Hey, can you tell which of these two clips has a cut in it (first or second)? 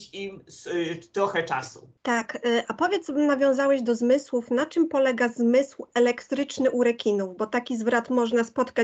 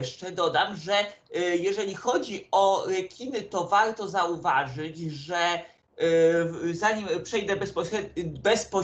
first